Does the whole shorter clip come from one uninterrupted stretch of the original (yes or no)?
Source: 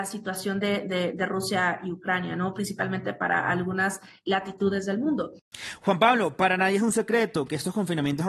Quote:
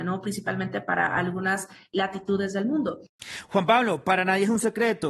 yes